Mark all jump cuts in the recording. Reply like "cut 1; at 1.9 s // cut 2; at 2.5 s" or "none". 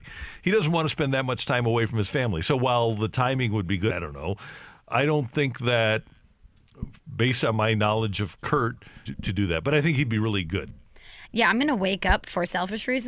cut 1; at 3.9 s // cut 2; at 9.1 s